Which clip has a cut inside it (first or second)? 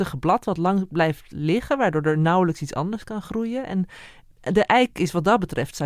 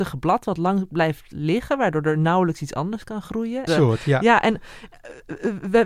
second